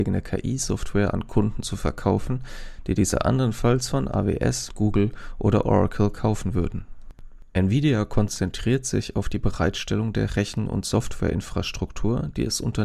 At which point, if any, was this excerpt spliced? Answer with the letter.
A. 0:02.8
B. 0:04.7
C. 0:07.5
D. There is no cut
B